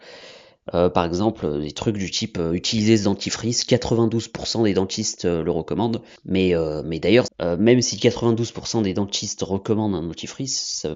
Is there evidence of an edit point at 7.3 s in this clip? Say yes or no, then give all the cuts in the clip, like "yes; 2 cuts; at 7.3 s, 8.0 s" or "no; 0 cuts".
yes; 2 cuts; at 6.2 s, 7.3 s